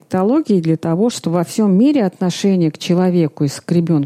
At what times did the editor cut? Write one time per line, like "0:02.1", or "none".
0:01.1